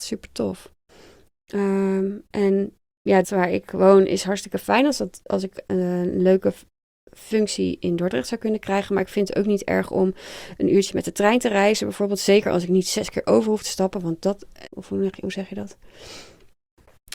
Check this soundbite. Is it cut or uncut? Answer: cut